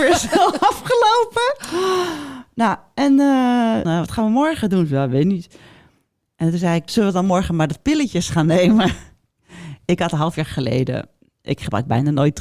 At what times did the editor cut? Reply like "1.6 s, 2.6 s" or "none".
3.8 s, 6.9 s